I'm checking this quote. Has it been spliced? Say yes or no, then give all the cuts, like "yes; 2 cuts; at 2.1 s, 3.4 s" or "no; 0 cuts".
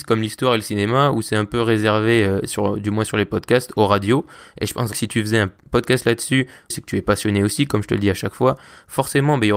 yes; 2 cuts; at 4.9 s, 6.7 s